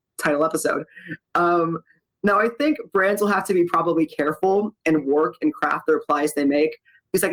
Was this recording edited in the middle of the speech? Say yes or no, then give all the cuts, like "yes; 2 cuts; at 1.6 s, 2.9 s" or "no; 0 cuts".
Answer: yes; 1 cut; at 5.0 s